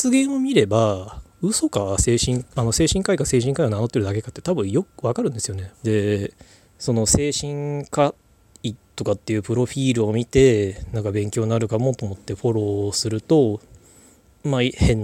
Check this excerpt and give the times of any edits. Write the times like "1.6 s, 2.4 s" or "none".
5.7 s